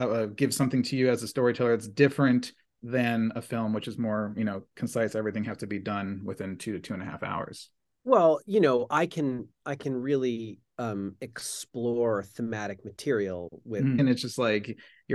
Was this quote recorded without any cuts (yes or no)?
no